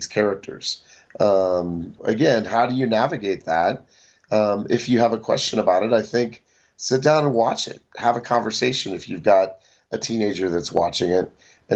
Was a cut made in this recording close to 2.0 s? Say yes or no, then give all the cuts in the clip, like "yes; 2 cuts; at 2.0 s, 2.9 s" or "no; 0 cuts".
yes; 1 cut; at 2.0 s